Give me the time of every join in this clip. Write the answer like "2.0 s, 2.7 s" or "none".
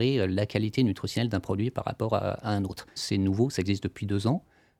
3.0 s